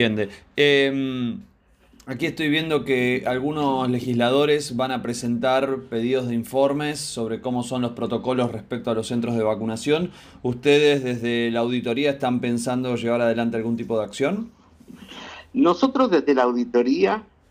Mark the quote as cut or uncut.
uncut